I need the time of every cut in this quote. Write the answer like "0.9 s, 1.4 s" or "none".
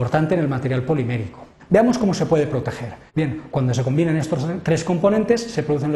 1.6 s, 3.1 s